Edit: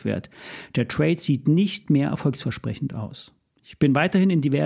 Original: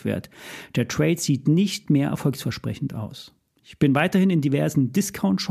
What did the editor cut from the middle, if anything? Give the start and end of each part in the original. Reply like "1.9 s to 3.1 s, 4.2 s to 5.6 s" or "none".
none